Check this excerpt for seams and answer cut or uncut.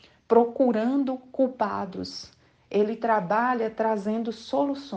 uncut